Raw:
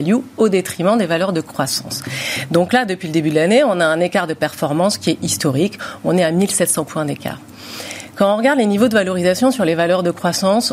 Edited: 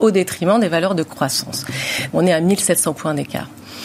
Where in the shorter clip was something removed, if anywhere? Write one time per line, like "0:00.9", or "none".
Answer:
0:02.1